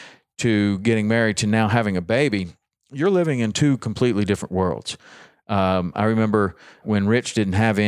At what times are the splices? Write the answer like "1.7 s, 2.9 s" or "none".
6.8 s